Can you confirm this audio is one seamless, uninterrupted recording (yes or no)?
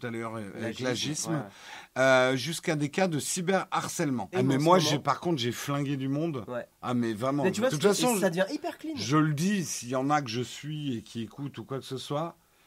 no